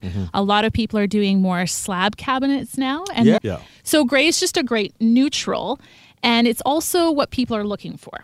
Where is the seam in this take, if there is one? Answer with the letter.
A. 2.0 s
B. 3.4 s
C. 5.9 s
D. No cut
B